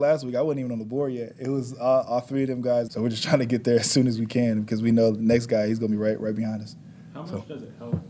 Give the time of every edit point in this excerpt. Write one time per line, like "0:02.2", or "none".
0:02.9